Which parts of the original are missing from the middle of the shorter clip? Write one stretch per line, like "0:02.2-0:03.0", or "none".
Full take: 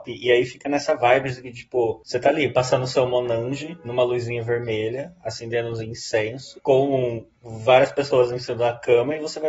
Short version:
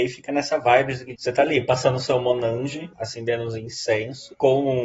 0:01.5-0:02.0
0:03.8-0:05.2